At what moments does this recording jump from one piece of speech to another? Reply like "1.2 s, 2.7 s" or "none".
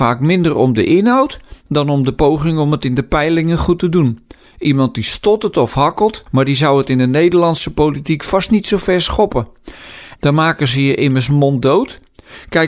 6.3 s, 10.2 s